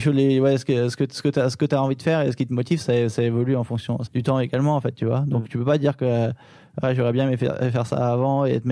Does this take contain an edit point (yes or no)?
yes